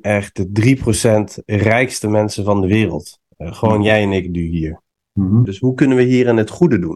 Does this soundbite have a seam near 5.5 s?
yes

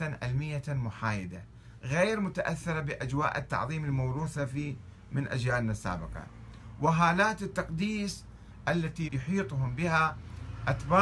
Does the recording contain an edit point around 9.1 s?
yes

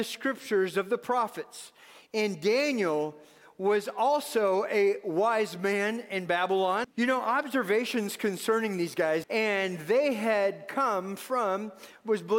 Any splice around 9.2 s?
yes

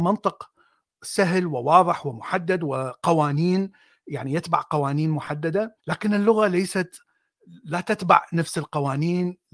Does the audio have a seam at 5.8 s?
yes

